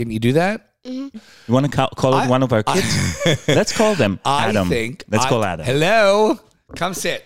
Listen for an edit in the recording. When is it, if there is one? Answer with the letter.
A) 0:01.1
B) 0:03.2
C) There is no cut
A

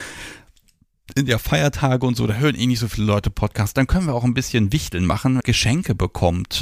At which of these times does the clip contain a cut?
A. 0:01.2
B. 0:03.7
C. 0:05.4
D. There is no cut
C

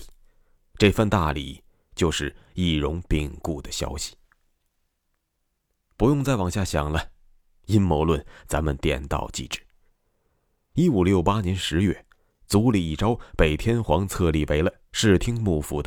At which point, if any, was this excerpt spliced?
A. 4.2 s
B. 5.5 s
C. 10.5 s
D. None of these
D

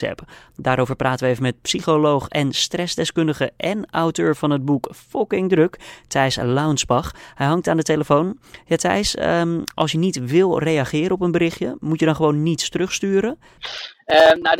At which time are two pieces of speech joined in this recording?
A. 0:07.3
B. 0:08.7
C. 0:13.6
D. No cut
C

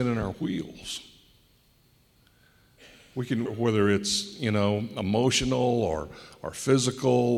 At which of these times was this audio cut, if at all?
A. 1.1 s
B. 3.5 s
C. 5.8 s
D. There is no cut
B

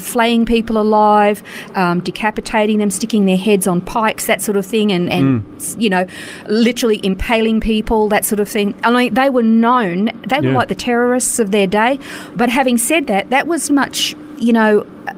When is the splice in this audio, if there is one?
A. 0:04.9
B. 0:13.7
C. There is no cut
B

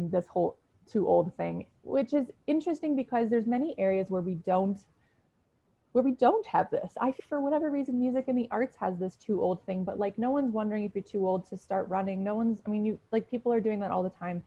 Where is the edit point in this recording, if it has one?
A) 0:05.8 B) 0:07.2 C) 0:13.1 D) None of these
B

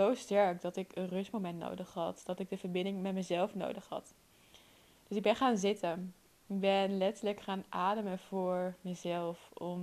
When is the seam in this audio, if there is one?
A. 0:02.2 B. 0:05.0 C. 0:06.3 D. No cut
C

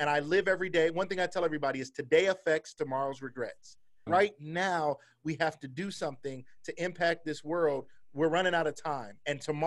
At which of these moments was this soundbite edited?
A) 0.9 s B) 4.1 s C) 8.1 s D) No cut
B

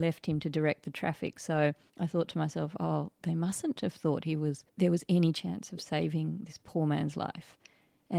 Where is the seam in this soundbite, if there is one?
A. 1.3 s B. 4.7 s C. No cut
B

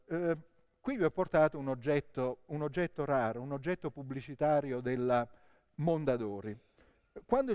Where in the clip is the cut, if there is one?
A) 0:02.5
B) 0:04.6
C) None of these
A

